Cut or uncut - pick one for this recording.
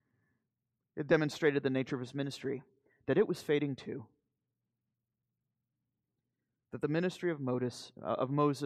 uncut